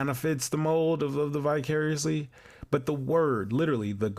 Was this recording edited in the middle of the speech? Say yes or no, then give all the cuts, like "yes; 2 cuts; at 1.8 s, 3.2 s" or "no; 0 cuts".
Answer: no; 0 cuts